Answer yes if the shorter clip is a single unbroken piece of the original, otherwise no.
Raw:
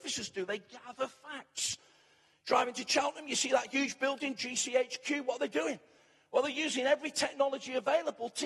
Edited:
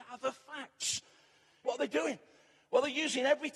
no